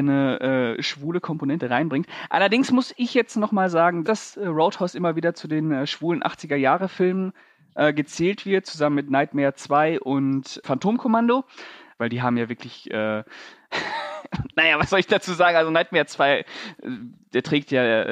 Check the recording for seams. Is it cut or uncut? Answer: cut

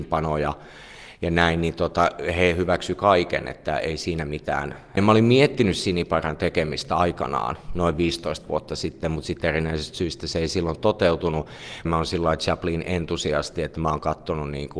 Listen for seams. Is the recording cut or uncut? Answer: cut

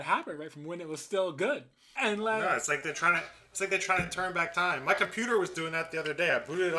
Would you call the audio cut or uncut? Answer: cut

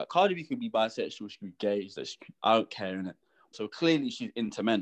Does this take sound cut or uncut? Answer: cut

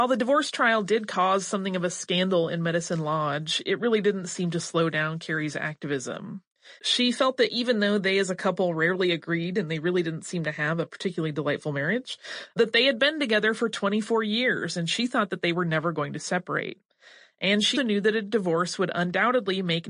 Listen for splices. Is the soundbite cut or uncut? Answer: cut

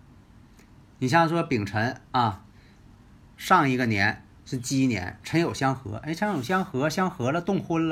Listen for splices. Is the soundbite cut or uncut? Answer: uncut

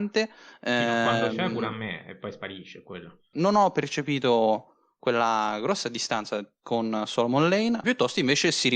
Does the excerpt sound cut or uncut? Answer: cut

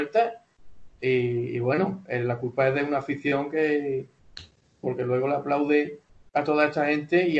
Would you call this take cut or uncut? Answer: cut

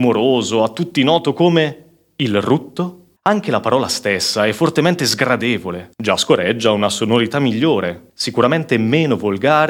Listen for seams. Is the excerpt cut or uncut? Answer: cut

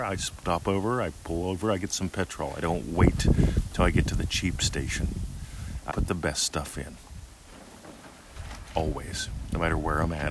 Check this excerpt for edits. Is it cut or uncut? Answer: cut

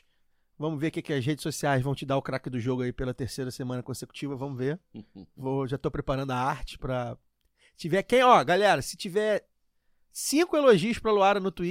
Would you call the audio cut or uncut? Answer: uncut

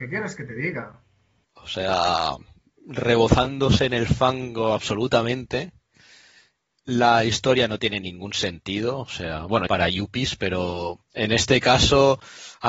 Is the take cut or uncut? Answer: cut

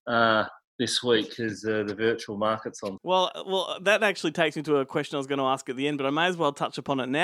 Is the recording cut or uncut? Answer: cut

